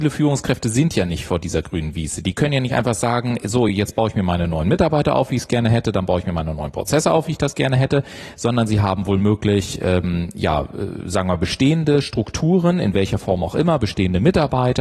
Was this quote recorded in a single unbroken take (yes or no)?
yes